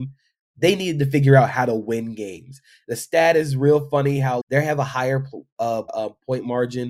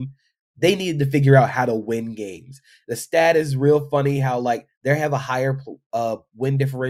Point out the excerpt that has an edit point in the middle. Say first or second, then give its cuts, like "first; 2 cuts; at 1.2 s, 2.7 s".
first; 2 cuts; at 4.4 s, 5.9 s